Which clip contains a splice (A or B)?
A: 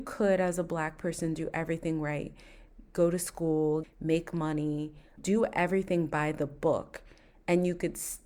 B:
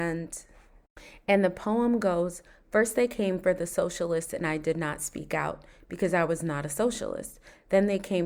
A